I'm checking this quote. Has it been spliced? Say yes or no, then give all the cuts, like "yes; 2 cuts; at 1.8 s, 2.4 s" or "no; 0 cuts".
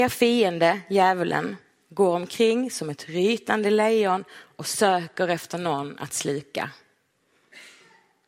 no; 0 cuts